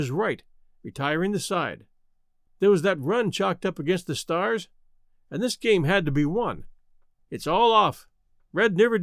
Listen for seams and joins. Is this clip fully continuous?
no; 2 cuts; at 2.5 s, 7.2 s

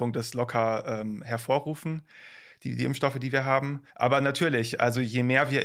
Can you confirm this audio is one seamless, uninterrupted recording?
no; 1 cut; at 3.9 s

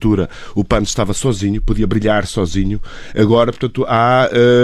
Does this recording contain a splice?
no; 0 cuts

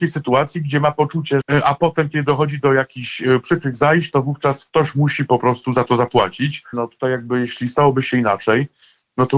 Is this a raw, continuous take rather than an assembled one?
no; 2 cuts; at 1.4 s, 6.7 s

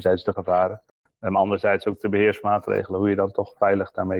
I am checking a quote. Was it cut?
no; 0 cuts

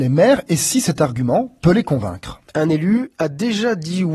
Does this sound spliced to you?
no; 0 cuts

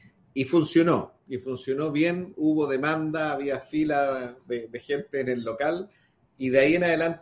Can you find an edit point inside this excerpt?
no; 0 cuts

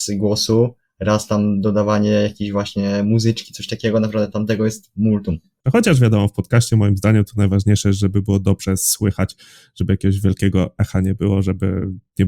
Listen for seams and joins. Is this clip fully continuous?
no; 1 cut; at 5.6 s

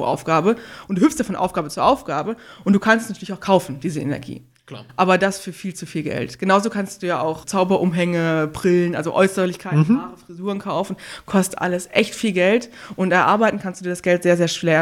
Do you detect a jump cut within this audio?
yes; 1 cut; at 7.4 s

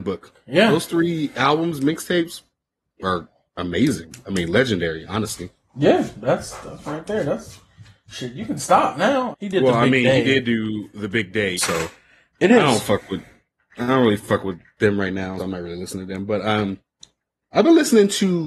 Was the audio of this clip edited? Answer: yes; 3 cuts; at 9.3 s, 11.6 s, 15.4 s

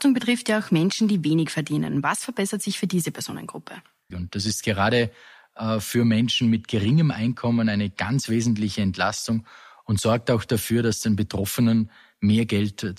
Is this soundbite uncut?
no; 1 cut; at 4.1 s

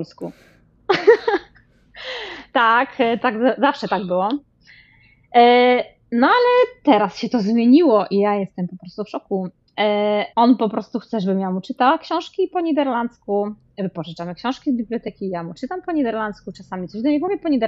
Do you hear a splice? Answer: yes; 1 cut; at 10.3 s

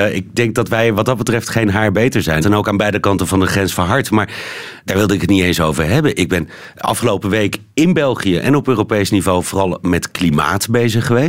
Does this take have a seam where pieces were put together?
yes; 1 cut; at 2.4 s

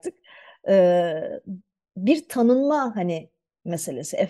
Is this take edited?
no; 0 cuts

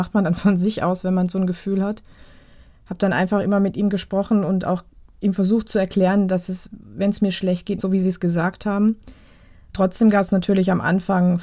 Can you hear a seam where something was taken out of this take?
yes; 1 cut; at 7.8 s

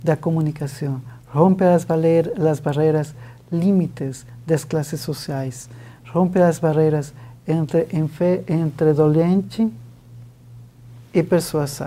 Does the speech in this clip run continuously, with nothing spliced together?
yes; 0 cuts

